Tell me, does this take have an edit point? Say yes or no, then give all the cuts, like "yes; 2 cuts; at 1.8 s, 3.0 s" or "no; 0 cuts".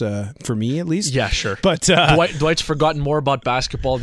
no; 0 cuts